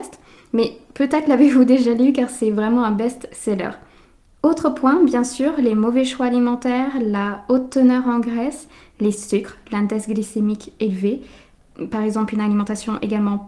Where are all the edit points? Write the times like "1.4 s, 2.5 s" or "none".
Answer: none